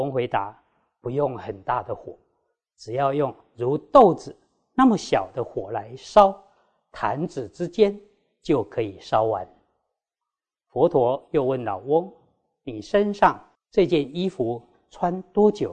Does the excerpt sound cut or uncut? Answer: uncut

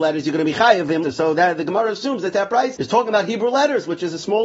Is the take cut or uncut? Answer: cut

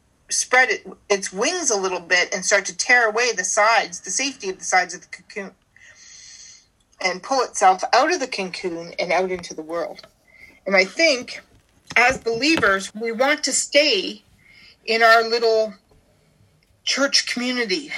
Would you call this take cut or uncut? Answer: cut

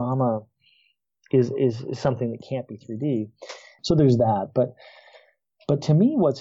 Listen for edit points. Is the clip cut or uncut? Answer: cut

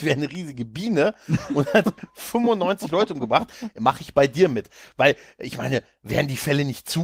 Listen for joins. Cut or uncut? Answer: uncut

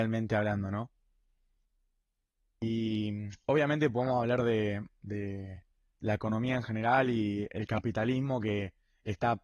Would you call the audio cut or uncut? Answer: uncut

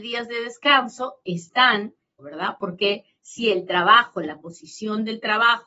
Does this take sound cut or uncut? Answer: cut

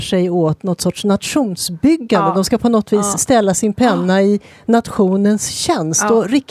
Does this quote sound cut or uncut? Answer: uncut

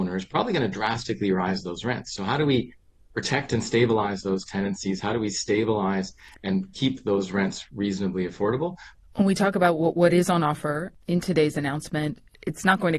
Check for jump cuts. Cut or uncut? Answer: cut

